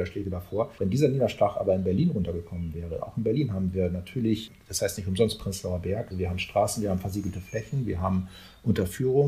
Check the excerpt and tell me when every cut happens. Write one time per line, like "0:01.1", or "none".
0:06.1